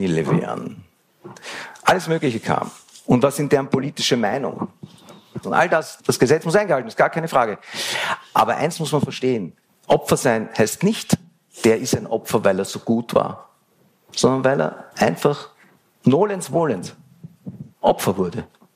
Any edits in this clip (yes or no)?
yes